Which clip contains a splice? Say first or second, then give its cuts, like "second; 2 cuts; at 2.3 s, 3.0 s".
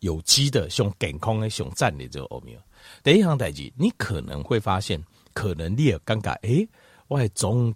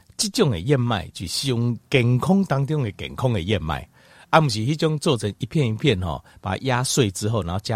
first; 1 cut; at 3.0 s